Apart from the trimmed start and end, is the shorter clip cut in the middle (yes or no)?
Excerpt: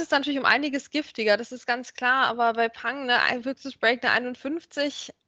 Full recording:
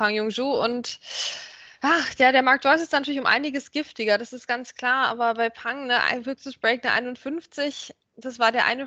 no